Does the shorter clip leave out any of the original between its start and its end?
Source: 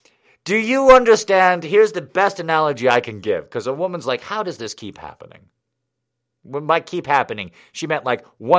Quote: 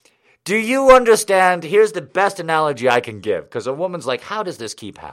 no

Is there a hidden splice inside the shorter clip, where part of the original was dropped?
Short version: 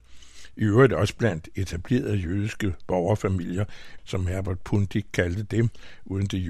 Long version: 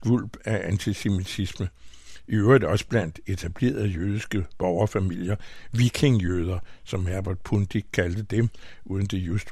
yes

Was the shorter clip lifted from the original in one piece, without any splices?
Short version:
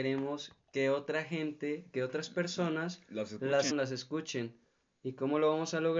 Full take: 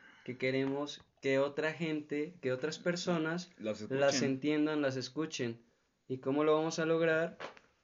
no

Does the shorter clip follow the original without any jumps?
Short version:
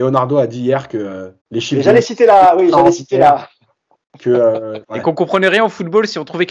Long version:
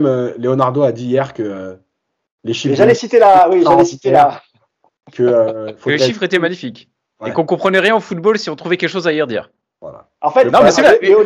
no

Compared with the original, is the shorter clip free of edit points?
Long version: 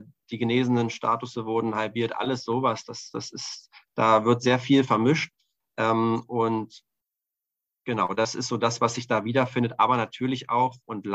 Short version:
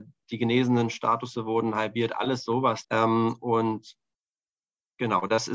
no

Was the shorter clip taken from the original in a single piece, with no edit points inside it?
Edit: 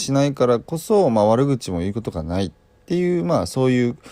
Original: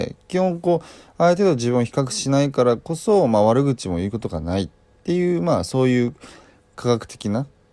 yes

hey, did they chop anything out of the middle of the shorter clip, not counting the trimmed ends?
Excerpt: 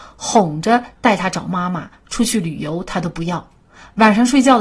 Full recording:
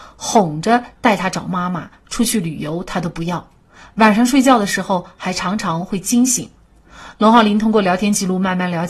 no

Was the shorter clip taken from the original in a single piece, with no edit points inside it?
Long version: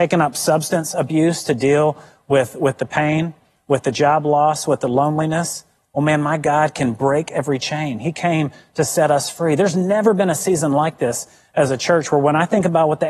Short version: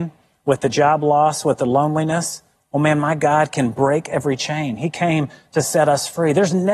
yes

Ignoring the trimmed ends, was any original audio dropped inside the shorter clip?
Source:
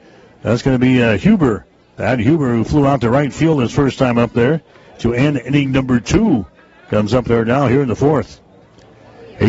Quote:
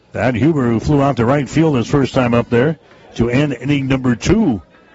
no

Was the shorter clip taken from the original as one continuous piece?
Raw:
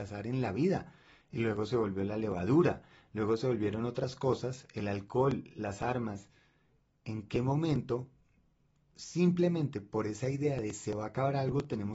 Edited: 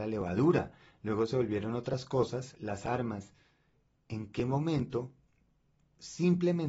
no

